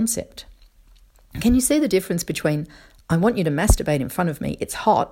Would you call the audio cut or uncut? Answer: uncut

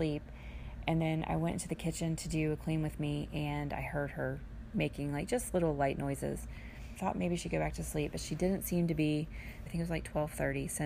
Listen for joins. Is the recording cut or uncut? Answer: cut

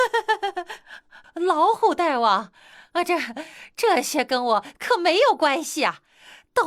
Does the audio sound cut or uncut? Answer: cut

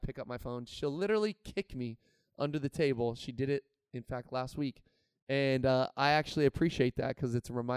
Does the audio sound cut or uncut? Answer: uncut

